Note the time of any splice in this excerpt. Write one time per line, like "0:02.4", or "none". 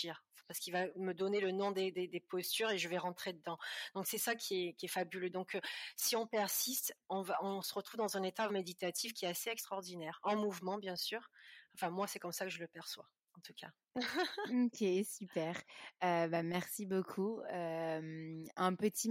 0:08.5
0:13.9